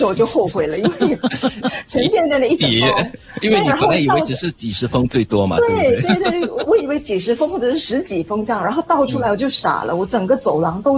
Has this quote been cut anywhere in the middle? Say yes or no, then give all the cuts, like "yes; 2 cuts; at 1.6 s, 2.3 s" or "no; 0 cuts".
no; 0 cuts